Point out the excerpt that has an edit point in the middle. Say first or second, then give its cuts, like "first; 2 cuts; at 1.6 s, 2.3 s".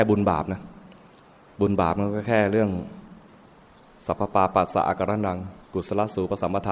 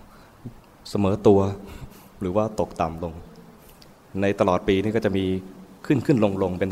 first; 1 cut; at 5.6 s